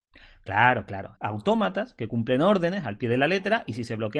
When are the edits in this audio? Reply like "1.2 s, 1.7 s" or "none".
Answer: 1.1 s

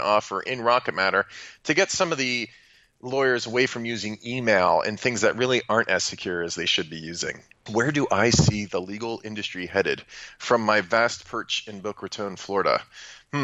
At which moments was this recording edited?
7.7 s

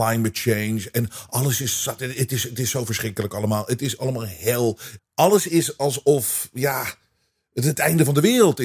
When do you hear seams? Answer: 5.0 s

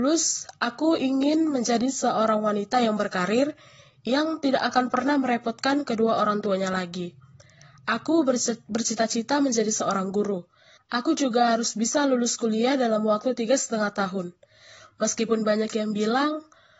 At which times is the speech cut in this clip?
10.8 s

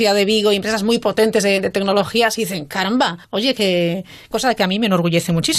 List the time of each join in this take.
3.2 s, 4.3 s

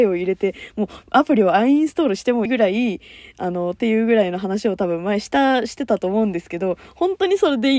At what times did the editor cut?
2.5 s

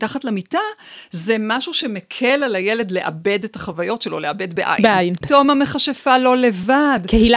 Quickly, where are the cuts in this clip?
5.2 s

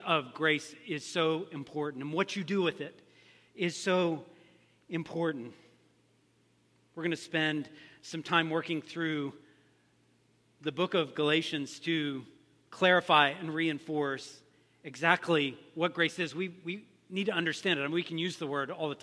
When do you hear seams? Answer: none

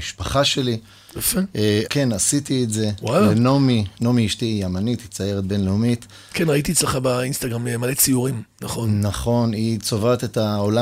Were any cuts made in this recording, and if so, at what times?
1.9 s

